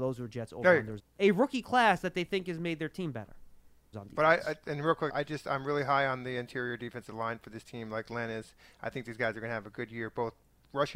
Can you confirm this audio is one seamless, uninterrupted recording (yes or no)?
no